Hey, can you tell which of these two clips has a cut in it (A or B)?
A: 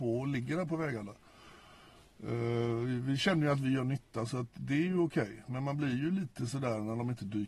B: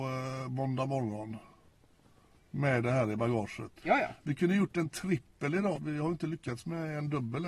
B